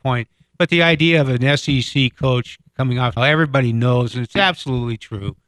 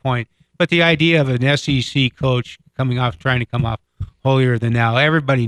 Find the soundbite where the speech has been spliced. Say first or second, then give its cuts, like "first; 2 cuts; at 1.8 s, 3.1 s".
first; 1 cut; at 3.2 s